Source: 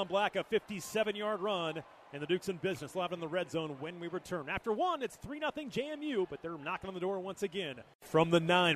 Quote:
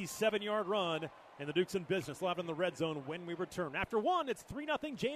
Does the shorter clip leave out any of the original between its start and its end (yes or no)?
no